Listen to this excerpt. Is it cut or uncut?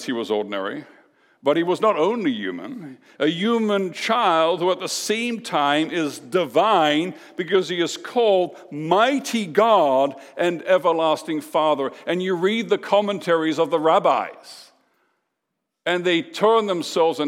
uncut